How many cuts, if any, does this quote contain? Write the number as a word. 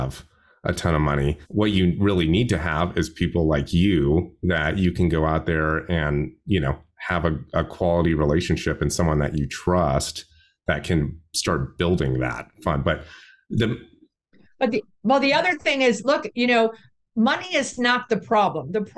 one